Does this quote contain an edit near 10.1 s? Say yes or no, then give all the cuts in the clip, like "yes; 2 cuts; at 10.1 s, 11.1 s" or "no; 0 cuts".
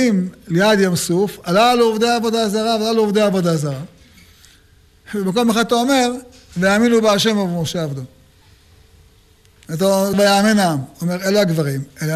yes; 1 cut; at 10.1 s